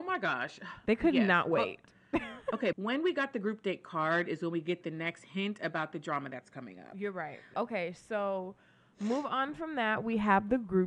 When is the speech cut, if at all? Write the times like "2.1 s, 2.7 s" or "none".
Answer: 2.7 s, 7.5 s